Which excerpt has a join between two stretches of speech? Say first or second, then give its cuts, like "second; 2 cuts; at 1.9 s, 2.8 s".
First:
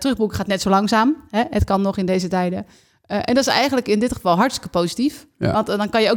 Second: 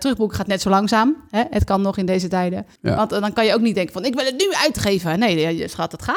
second; 1 cut; at 2.8 s